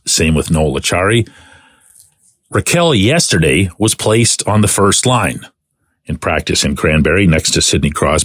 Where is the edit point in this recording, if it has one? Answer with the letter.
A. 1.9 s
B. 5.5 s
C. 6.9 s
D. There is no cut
D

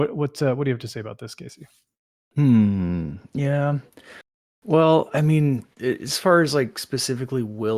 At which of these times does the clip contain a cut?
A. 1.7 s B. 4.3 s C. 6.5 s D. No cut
D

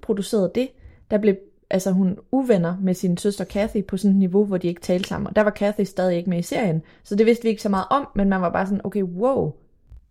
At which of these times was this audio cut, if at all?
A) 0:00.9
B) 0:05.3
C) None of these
C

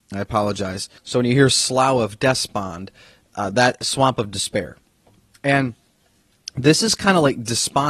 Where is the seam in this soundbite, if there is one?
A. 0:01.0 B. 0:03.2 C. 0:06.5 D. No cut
A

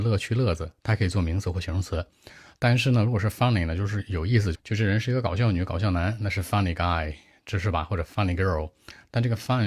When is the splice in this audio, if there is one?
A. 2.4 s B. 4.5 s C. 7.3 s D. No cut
B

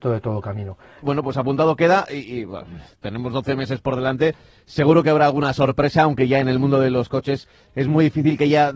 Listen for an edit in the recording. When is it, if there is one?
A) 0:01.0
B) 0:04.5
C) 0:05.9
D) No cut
A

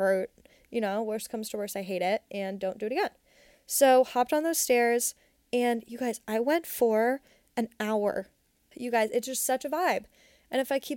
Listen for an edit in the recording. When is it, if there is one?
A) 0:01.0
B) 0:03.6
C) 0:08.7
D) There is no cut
C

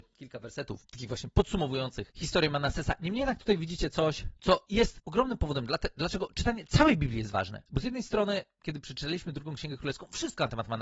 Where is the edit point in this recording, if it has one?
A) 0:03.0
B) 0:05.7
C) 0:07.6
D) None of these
D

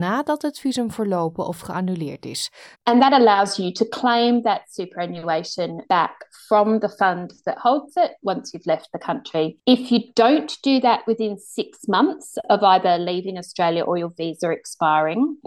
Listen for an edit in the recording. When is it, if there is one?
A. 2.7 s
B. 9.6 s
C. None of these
A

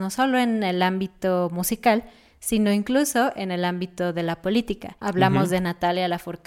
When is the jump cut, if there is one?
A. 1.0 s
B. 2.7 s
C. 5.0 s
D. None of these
C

